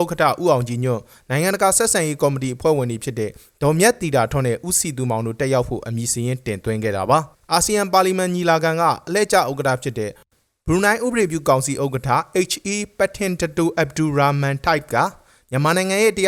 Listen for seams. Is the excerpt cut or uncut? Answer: uncut